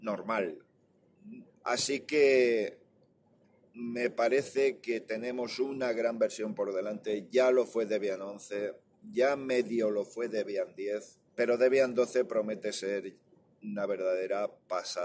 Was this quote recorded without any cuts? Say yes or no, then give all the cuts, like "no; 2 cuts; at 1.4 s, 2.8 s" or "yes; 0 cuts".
no; 2 cuts; at 1.5 s, 11.3 s